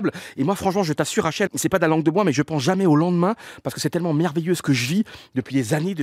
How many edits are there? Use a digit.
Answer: 1